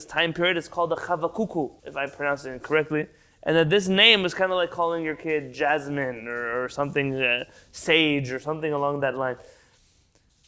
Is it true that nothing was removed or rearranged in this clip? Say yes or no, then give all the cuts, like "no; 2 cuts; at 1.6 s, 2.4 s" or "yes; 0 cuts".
no; 1 cut; at 1.8 s